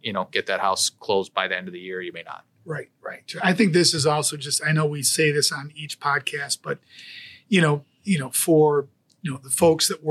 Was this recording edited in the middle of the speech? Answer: no; 0 cuts

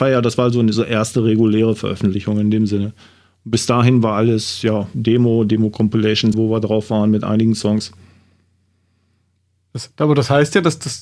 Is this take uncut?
no; 1 cut; at 6.3 s

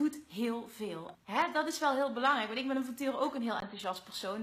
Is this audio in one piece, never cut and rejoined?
no; 1 cut; at 1.1 s

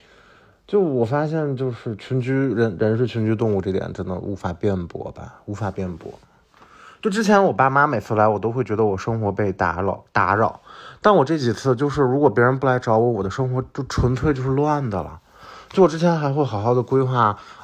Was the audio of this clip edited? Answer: no; 0 cuts

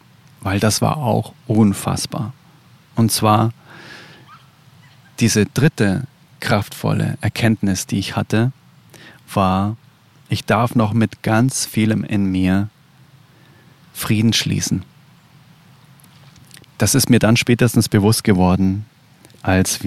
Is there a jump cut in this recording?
no; 0 cuts

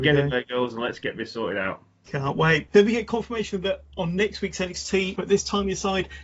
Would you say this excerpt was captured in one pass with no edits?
no; 2 cuts; at 2.7 s, 5.2 s

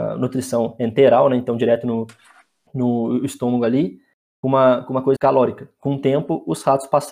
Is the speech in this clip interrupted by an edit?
yes; 1 cut; at 5.2 s

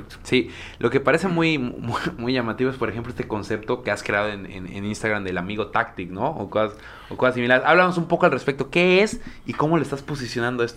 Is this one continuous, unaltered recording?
yes; 0 cuts

